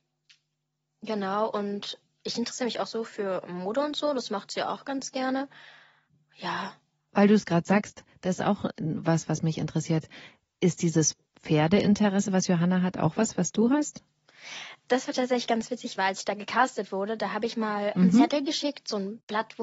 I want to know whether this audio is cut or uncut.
cut